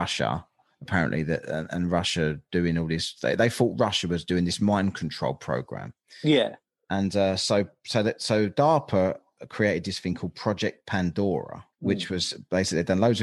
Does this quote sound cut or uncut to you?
cut